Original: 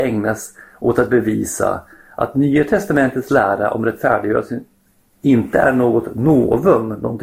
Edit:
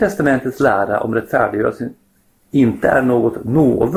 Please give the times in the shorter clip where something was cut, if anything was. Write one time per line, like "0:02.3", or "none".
none